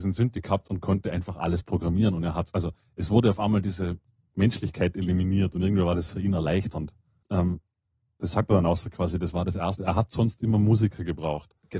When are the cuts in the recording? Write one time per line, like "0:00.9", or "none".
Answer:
0:07.2